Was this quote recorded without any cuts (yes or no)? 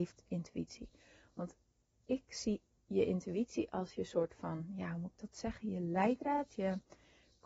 yes